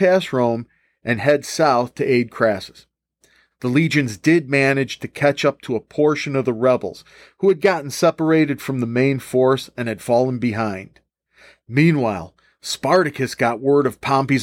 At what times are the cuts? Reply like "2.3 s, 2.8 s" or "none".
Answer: 3.5 s, 11.6 s